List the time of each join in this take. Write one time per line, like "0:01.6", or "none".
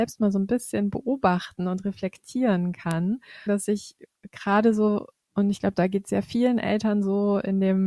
0:03.5